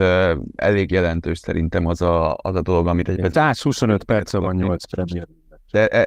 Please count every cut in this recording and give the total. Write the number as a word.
one